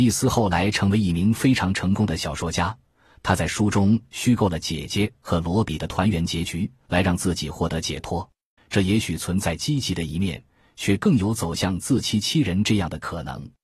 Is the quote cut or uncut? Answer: cut